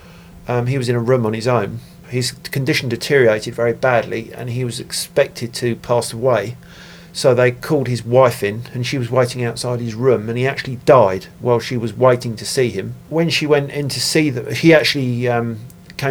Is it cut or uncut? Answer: uncut